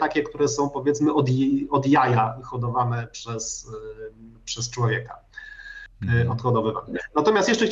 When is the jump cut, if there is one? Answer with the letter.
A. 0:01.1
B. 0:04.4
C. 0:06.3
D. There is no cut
B